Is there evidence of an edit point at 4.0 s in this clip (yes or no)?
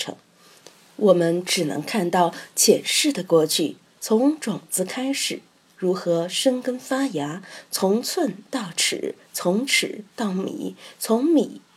yes